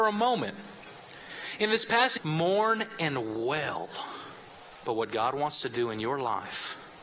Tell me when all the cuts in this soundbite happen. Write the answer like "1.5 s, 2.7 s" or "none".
2.2 s, 4.8 s